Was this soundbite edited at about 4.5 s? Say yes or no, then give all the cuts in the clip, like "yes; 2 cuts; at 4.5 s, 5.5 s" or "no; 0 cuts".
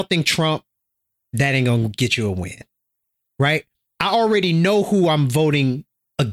no; 1 cut; at 3.2 s